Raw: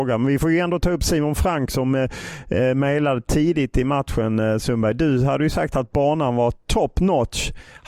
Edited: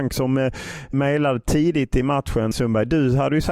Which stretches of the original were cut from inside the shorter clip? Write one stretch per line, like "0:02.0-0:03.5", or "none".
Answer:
0:02.5-0:02.7
0:04.3-0:04.6